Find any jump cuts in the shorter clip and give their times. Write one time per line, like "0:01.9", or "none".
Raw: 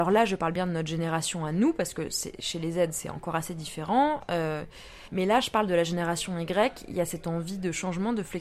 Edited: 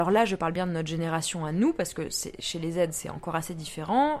none